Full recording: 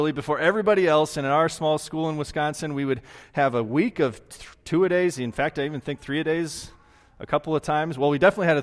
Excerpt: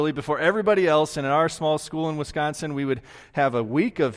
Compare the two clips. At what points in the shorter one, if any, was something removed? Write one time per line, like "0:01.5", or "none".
none

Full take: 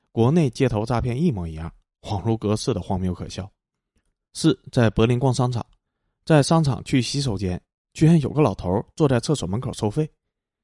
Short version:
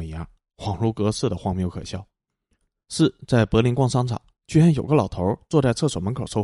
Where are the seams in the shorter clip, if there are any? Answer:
0:04.4

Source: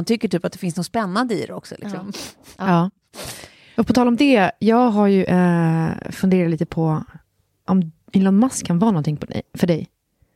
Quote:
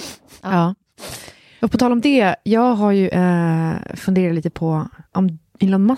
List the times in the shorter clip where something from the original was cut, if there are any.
0:05.1

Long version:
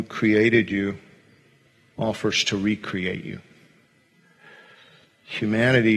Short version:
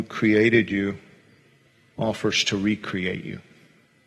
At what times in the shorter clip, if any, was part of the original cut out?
none

